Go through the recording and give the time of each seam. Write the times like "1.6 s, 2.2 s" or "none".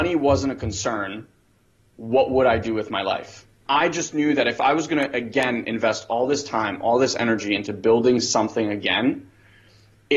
3.7 s